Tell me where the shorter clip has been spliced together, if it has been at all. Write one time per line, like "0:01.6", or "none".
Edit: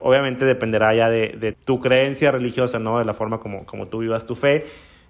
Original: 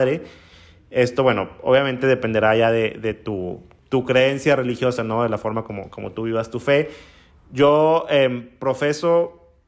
0:01.5